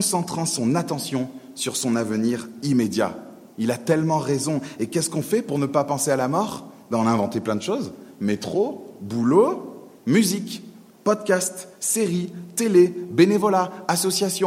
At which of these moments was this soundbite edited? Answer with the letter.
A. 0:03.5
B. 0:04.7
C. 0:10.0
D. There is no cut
C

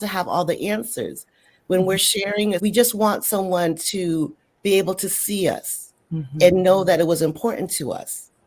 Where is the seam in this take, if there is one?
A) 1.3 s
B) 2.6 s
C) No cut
B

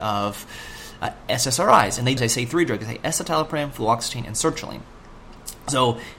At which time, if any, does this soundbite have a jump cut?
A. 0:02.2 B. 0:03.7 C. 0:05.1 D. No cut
A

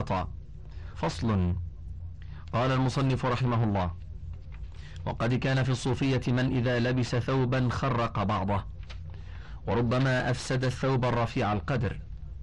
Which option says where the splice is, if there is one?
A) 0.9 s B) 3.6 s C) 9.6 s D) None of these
A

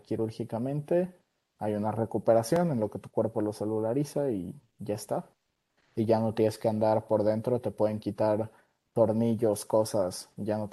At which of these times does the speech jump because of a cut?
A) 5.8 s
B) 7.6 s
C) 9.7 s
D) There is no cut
D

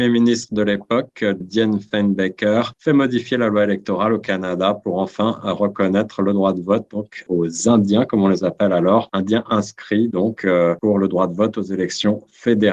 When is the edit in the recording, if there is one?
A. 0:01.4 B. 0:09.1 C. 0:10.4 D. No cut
A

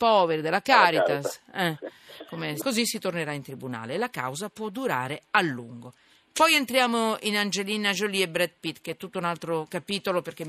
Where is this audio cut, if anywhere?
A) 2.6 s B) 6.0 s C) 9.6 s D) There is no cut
A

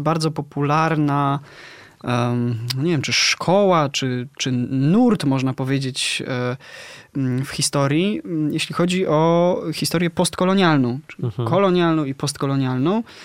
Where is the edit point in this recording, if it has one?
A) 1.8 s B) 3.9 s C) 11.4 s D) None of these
D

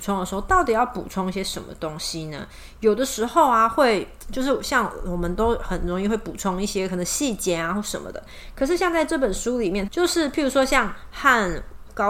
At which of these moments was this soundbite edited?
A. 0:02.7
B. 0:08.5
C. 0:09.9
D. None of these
C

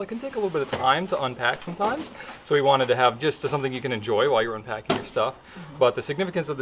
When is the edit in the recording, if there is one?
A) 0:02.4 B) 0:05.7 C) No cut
C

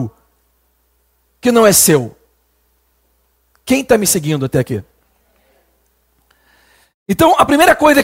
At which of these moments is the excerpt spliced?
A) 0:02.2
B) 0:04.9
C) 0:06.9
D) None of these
D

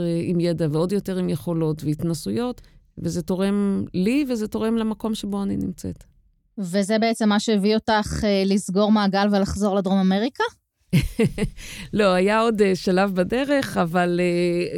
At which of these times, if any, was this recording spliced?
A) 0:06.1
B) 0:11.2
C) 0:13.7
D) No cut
D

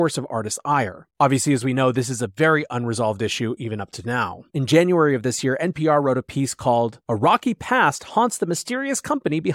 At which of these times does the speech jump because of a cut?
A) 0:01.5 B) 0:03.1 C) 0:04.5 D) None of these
C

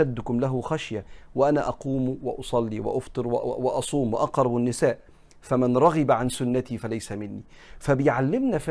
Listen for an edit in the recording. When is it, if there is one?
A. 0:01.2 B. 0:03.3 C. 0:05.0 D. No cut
D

